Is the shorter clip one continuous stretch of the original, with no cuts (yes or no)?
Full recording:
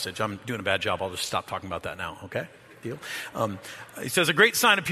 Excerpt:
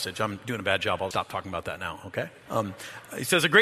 no